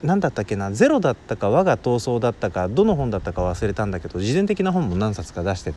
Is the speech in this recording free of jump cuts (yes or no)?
yes